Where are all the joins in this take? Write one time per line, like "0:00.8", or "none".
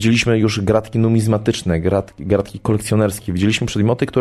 none